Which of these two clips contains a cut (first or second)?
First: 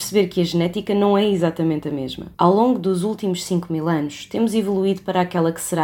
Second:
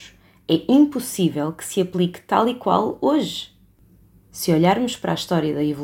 first